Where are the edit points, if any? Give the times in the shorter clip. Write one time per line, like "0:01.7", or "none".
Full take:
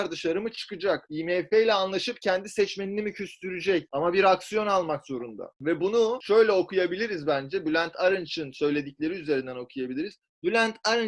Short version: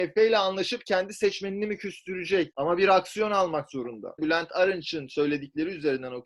0:04.2